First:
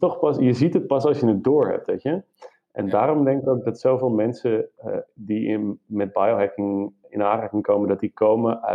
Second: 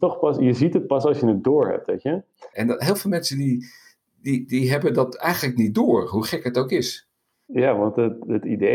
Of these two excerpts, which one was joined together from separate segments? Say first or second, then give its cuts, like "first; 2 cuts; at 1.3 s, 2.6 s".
second; 1 cut; at 2.5 s